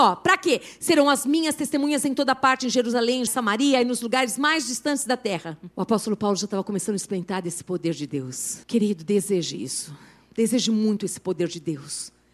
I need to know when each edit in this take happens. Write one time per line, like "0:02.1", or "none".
0:03.3
0:05.7
0:08.6